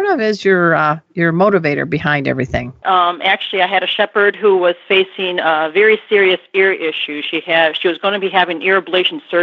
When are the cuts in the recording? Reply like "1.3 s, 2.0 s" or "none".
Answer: 2.8 s